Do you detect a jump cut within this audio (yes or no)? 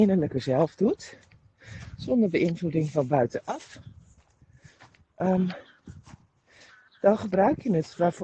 no